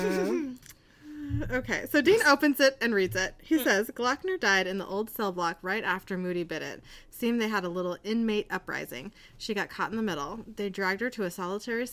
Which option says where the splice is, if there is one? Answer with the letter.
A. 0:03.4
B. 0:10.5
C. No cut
C